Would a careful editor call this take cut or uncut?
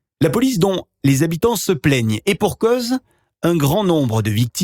cut